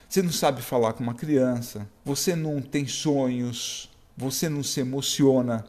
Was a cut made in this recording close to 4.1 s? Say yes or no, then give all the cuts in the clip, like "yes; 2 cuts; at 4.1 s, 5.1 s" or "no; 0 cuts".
yes; 2 cuts; at 2.0 s, 4.1 s